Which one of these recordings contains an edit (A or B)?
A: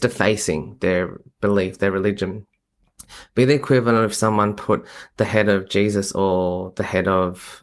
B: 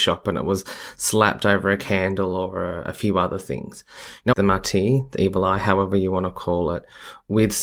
B